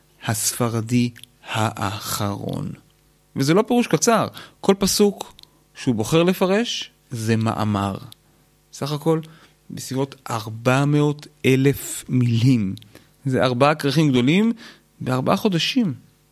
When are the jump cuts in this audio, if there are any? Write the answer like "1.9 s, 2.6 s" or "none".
3.2 s